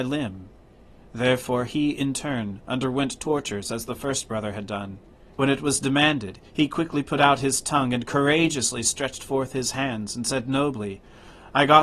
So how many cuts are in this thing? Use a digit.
2